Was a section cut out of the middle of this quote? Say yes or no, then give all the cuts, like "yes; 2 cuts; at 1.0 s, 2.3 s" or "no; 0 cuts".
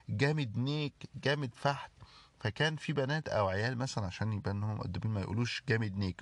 no; 0 cuts